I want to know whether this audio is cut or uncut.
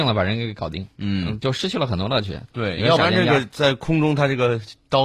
cut